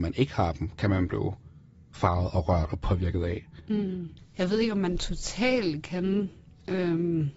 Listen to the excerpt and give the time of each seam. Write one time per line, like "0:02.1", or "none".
0:04.2

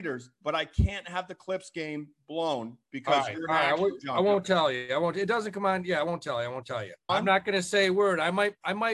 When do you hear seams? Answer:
0:07.1

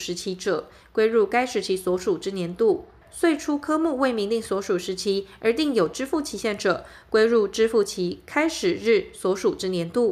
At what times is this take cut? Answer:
0:03.0

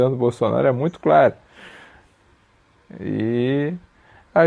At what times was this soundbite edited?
none

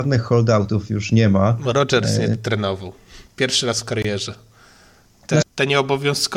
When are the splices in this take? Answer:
0:05.4

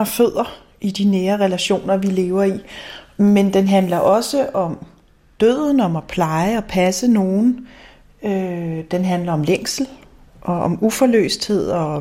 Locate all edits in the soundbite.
none

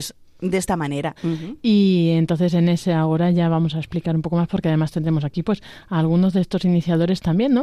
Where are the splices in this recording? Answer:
0:01.2

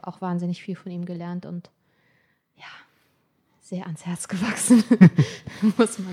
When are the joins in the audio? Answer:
none

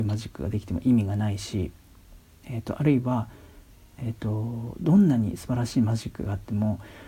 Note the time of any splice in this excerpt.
none

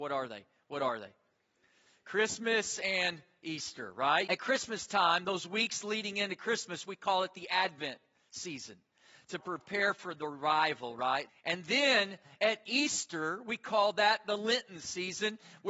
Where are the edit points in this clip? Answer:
0:04.3
0:11.3

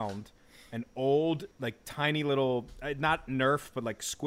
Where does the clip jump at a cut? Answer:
0:01.5

